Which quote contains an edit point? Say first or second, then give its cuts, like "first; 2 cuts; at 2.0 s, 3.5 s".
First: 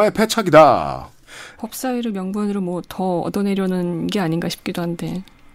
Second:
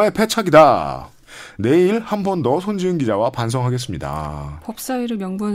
first; 1 cut; at 1.6 s